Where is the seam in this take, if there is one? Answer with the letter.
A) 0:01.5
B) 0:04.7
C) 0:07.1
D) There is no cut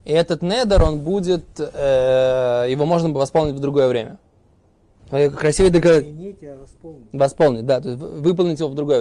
D